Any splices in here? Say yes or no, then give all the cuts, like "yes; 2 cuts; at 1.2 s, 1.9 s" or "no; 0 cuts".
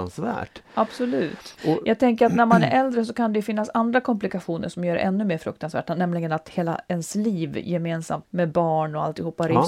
yes; 1 cut; at 8.2 s